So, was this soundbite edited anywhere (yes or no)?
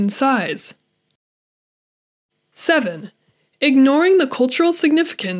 no